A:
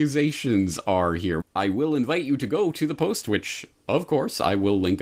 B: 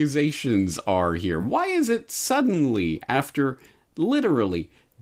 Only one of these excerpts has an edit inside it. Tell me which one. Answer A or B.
A